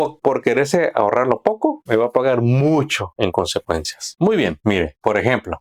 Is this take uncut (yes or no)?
yes